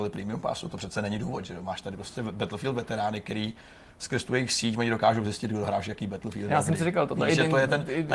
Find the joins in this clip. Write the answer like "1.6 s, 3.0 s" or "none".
none